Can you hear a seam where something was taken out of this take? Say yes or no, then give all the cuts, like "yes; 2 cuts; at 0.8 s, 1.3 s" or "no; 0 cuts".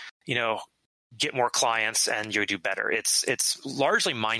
no; 0 cuts